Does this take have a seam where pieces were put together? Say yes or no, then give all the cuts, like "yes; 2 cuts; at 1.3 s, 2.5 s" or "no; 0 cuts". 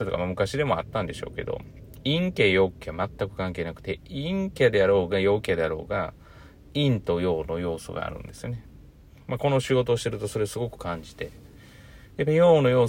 no; 0 cuts